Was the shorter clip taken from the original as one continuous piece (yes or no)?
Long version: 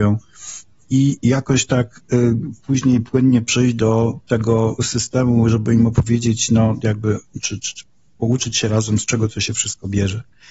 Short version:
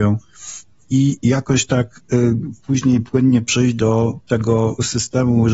yes